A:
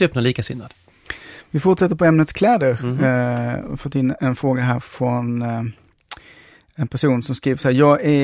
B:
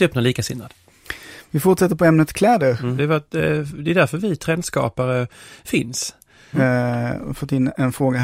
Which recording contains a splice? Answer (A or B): B